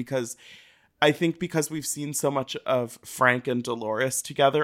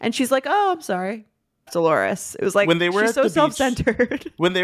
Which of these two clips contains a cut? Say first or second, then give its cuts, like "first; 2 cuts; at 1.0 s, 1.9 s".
second; 1 cut; at 1.7 s